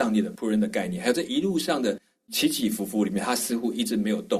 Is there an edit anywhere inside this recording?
no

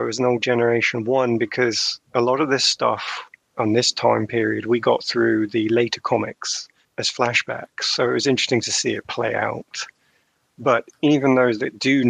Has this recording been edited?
no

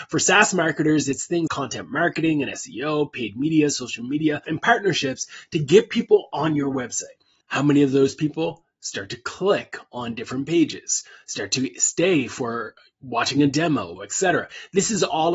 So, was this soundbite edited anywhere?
yes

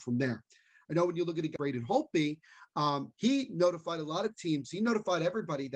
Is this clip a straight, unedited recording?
no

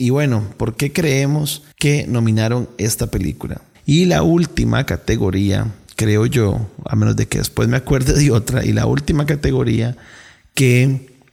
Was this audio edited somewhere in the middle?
yes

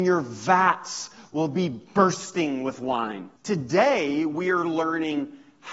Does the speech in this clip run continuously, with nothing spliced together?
no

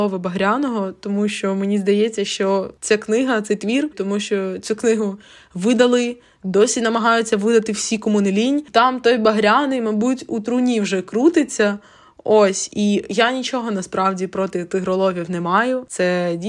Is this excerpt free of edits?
no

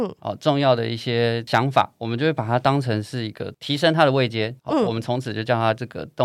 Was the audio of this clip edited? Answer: no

